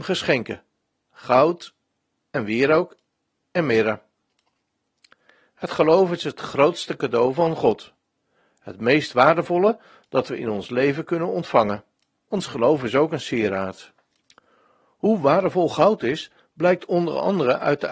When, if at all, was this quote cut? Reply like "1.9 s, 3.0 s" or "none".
12.2 s